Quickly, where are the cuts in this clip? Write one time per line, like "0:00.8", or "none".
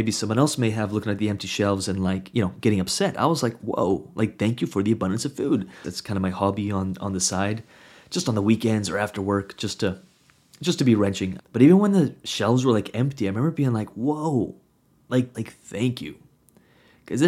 0:05.8
0:11.4
0:15.3